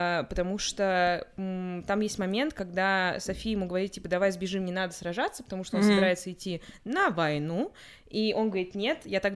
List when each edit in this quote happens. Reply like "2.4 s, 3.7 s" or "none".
none